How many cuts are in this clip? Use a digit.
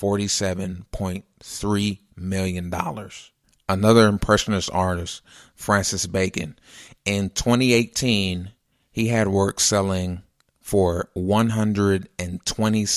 0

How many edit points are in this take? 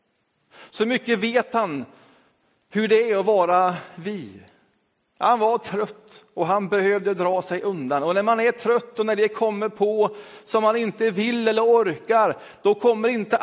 0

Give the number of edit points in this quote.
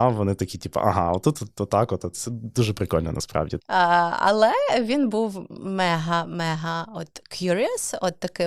1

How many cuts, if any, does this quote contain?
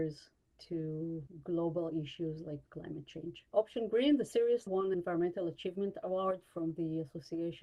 0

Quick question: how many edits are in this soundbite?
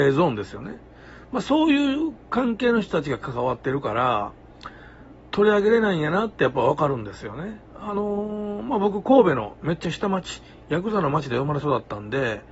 0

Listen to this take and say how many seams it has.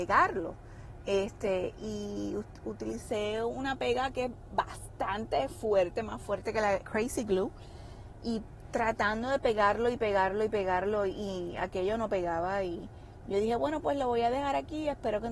1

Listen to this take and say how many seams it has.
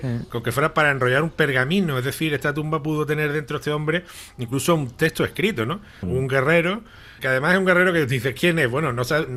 2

